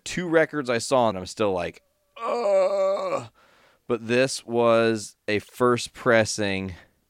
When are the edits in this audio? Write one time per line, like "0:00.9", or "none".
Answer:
0:01.1